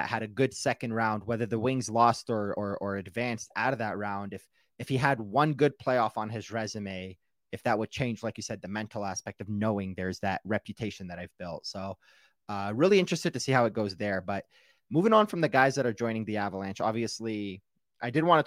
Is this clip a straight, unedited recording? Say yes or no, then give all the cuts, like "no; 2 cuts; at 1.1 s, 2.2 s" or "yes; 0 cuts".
yes; 0 cuts